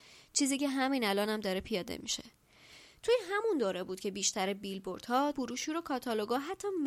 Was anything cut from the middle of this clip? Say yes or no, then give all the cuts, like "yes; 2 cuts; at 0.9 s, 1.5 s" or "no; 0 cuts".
yes; 1 cut; at 5.3 s